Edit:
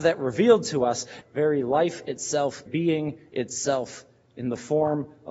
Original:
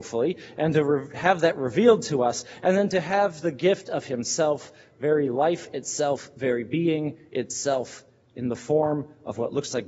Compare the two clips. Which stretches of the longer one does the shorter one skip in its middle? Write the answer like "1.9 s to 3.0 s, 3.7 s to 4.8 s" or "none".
2.6 s to 4.9 s, 6.3 s to 6.7 s